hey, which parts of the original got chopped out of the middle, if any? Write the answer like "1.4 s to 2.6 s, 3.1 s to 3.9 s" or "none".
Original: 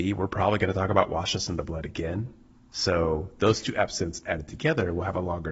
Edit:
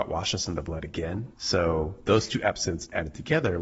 2.3 s to 2.7 s